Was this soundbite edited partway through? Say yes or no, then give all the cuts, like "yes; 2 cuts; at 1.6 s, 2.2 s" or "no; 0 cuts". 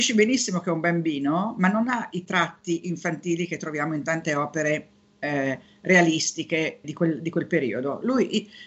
yes; 1 cut; at 6.8 s